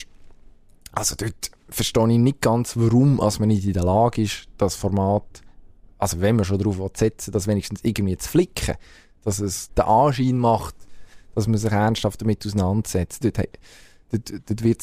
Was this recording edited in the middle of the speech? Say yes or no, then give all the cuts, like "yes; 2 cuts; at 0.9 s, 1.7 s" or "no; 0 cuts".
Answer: yes; 2 cuts; at 9.7 s, 13.2 s